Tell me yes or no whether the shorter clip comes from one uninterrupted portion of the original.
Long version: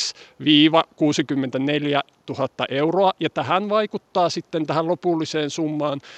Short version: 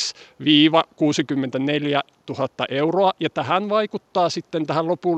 yes